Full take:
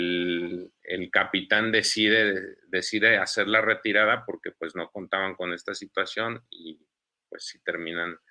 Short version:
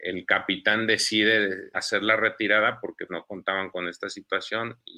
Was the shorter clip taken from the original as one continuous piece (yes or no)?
no